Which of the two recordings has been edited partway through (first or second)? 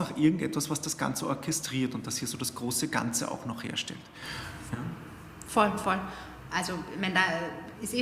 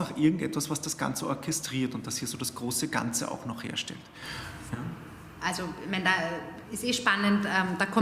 second